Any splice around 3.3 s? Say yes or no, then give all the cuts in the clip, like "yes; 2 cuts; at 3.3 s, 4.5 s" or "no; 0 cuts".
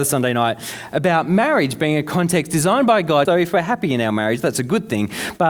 yes; 1 cut; at 3.3 s